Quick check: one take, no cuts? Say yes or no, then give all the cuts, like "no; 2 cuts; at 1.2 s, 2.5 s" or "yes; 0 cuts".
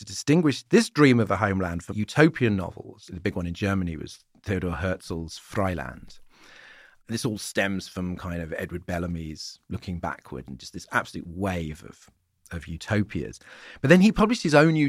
no; 2 cuts; at 1.9 s, 3.1 s